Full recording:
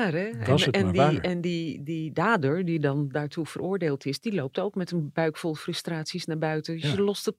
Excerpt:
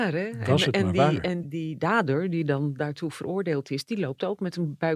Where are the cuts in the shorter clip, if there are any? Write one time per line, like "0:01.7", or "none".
0:01.4